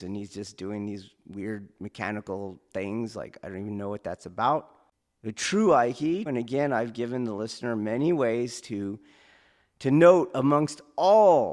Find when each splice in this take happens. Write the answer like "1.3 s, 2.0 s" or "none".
6.3 s